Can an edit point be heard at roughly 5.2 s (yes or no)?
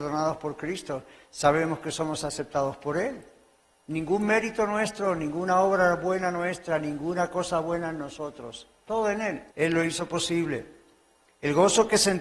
no